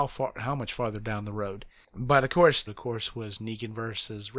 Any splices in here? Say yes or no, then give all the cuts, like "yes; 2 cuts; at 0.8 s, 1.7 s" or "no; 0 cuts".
yes; 1 cut; at 2.7 s